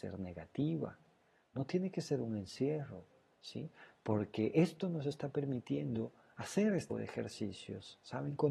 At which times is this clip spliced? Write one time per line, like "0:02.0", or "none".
0:06.9